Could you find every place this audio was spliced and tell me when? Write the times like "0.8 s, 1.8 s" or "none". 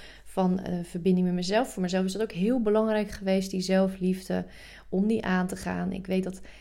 none